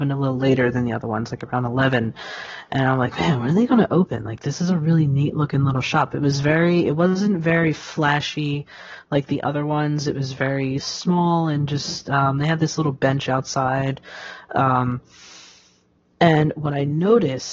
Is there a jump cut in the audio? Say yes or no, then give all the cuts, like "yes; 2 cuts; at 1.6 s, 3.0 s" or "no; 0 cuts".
no; 0 cuts